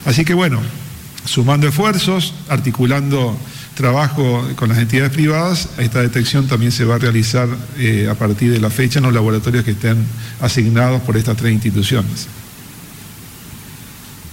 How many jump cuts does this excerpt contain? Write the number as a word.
one